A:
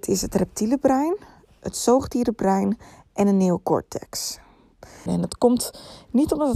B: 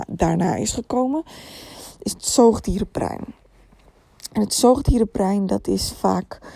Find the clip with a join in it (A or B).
A